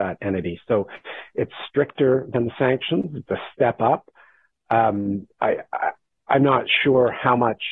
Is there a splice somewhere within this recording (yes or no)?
no